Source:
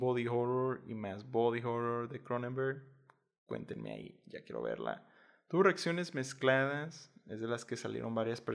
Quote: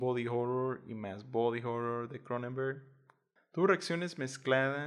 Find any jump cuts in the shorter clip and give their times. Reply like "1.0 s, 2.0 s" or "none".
3.4 s